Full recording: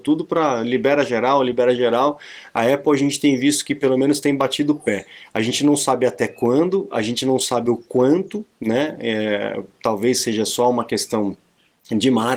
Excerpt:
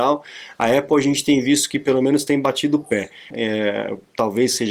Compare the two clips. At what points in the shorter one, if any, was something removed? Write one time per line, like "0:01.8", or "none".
0:03.3

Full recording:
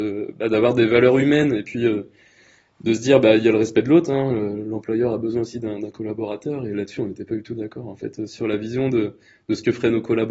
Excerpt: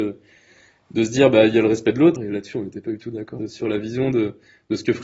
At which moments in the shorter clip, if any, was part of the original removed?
0:02.2
0:03.4

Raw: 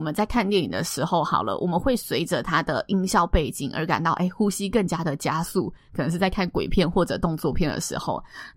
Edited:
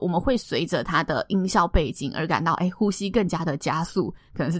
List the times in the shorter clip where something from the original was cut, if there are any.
none

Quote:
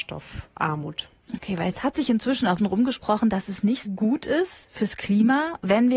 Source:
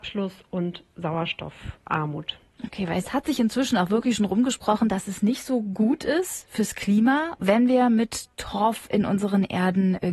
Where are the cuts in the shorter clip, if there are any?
0:02.6
0:03.8

